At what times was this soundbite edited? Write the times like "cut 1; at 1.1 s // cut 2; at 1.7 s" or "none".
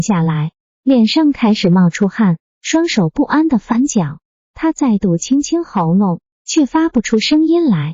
cut 1; at 6.3 s

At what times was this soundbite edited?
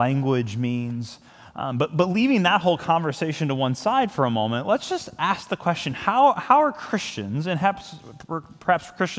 none

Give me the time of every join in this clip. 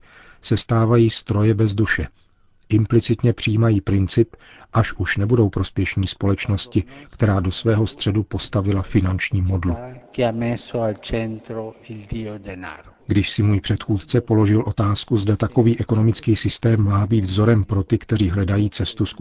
cut 1; at 4.6 s // cut 2; at 13.0 s

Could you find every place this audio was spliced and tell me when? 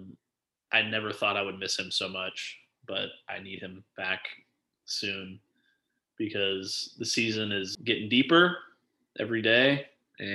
cut 1; at 7.7 s

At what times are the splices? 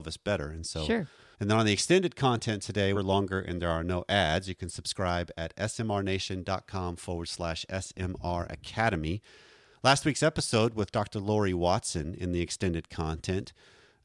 cut 1; at 1.3 s // cut 2; at 2.9 s

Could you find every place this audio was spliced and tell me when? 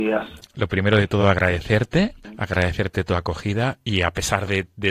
none

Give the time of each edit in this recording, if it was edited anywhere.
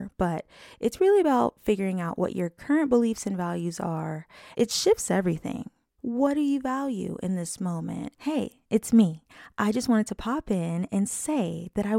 cut 1; at 4.5 s // cut 2; at 6.0 s // cut 3; at 8.1 s

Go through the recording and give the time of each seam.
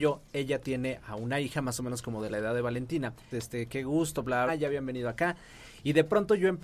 cut 1; at 3.3 s // cut 2; at 4.5 s

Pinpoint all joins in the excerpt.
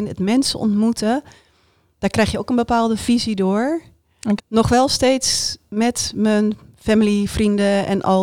cut 1; at 4.4 s

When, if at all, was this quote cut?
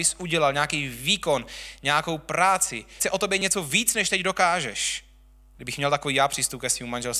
cut 1; at 5.5 s

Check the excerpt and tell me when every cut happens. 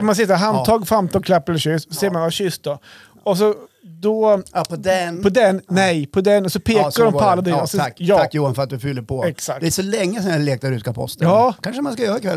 none

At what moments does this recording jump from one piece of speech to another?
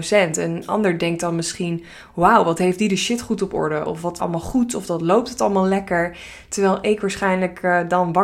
cut 1; at 4.2 s

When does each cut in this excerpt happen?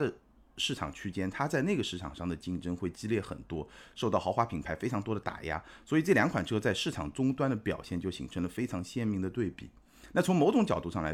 none

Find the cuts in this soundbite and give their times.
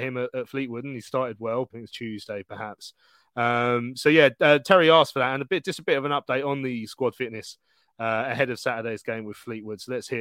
cut 1; at 1.7 s

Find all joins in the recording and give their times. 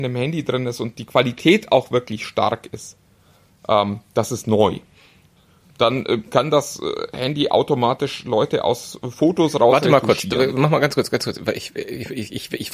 none

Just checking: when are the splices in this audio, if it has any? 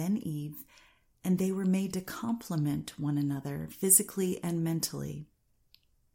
none

